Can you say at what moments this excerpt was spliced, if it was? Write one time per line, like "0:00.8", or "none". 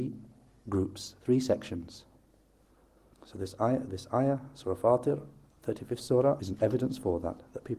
0:03.1
0:06.4